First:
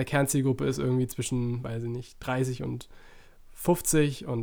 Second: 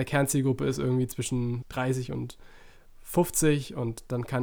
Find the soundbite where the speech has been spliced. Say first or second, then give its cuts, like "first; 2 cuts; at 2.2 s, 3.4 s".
second; 1 cut; at 1.6 s